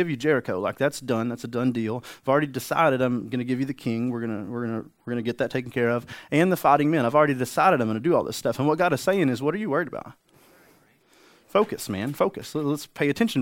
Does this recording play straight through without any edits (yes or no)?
yes